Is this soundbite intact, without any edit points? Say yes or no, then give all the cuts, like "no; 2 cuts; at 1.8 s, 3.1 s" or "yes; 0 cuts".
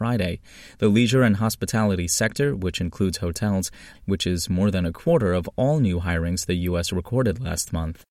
no; 1 cut; at 3.9 s